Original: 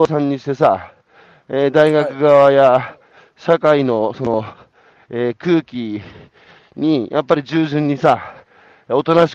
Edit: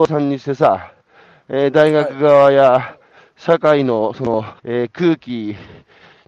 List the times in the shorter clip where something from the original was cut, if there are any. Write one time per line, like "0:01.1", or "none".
0:04.6